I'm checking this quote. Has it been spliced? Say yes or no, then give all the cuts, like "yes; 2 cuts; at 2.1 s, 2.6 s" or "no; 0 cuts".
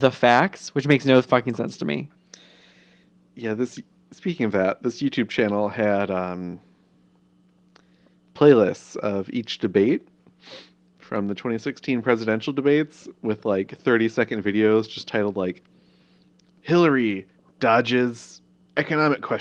no; 0 cuts